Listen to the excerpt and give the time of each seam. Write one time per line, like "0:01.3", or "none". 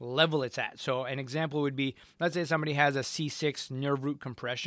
none